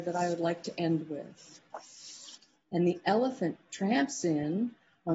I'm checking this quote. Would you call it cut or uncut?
cut